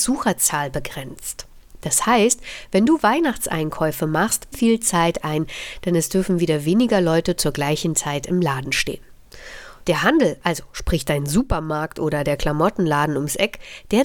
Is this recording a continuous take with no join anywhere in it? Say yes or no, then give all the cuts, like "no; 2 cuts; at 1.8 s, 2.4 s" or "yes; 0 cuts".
no; 2 cuts; at 4.5 s, 9.8 s